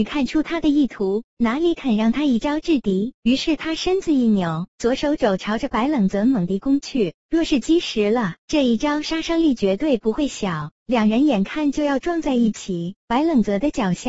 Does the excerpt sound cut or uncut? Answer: uncut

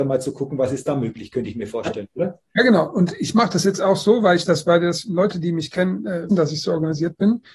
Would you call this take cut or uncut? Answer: cut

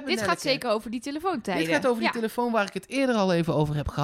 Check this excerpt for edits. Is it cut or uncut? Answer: uncut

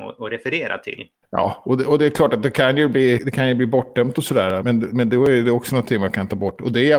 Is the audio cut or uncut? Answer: cut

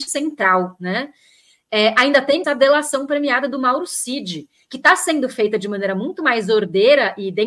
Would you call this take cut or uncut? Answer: cut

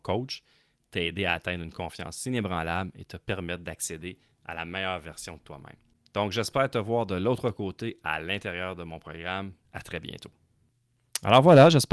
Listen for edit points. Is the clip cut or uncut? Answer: cut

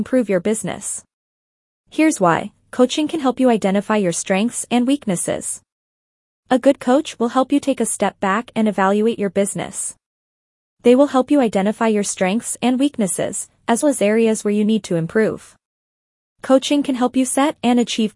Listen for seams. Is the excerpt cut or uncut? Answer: cut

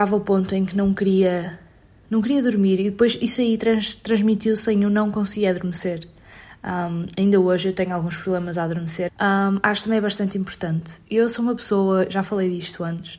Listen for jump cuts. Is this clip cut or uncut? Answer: cut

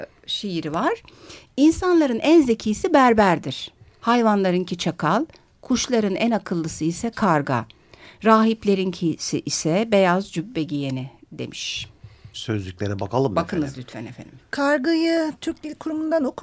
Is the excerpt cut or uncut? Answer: cut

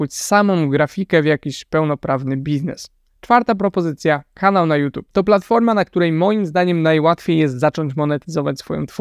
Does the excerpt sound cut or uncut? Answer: uncut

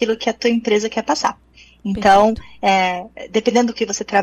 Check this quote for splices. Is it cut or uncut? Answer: uncut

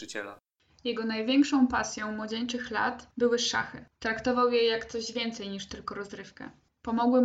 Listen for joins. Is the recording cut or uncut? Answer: uncut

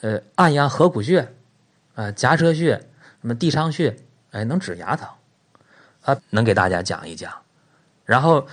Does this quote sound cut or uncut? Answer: cut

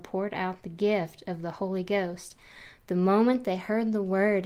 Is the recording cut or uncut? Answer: uncut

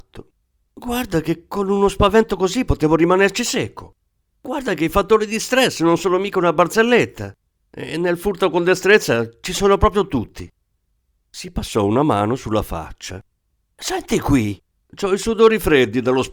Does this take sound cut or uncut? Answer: uncut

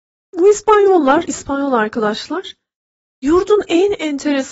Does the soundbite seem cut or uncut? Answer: uncut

